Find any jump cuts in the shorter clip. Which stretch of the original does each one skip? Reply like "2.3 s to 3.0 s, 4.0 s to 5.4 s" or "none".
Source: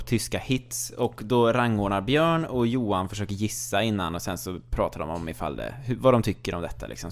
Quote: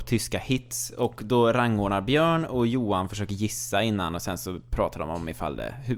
none